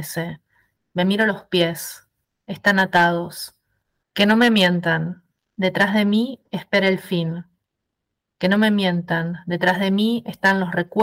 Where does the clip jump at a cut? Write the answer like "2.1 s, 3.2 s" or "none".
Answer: 4.0 s